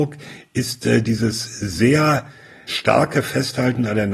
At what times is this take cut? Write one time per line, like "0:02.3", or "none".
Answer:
0:02.7